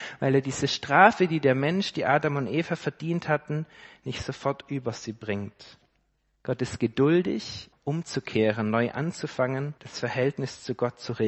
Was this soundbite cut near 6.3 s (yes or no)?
no